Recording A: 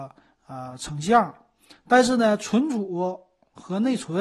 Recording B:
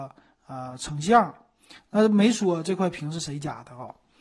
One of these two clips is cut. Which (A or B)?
A